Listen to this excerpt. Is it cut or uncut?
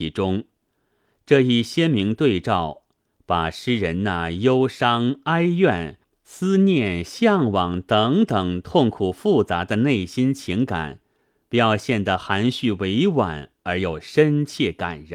uncut